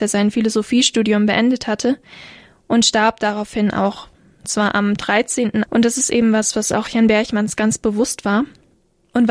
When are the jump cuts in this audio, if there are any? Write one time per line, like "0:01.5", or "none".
0:05.6